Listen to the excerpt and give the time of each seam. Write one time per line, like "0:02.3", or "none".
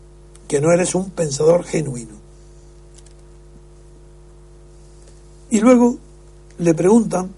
none